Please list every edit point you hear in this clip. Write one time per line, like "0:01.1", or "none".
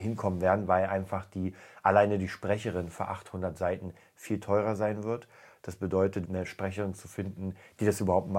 0:06.2

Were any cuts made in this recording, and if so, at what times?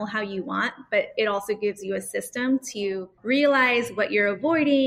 0:03.2

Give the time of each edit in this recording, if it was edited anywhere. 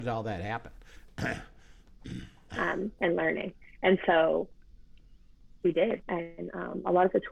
0:02.5
0:06.0

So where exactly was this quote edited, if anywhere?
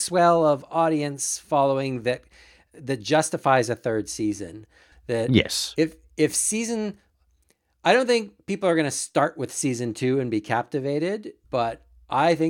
0:04.9
0:11.4

